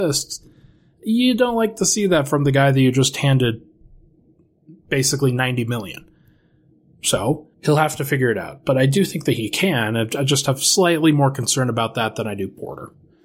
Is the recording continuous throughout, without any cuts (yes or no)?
no